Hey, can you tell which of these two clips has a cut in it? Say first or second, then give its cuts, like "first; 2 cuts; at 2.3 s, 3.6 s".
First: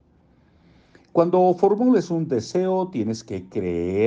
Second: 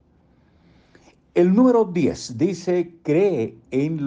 first; 1 cut; at 1.0 s